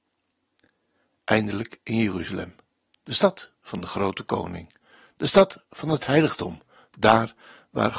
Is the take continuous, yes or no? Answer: yes